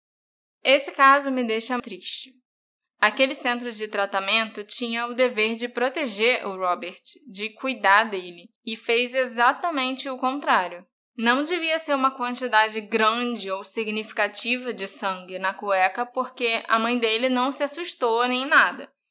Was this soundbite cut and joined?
yes; 2 cuts; at 1.8 s, 11.1 s

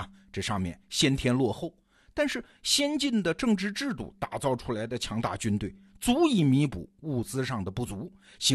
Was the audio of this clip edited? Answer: no; 0 cuts

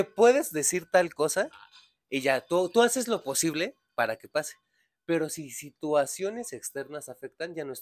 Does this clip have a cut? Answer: no; 0 cuts

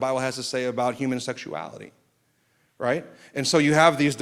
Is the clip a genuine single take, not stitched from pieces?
yes; 0 cuts

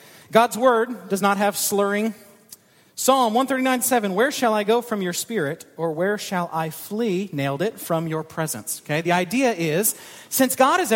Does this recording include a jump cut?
no; 0 cuts

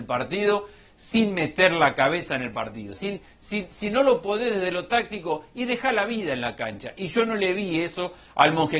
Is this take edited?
yes; 1 cut; at 3.0 s

